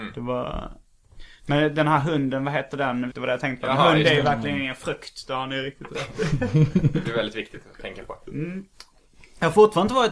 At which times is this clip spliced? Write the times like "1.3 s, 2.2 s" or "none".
3.1 s